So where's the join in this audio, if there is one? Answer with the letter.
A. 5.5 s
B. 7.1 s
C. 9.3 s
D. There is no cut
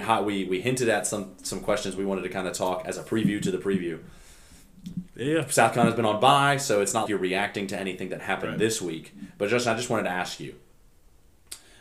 B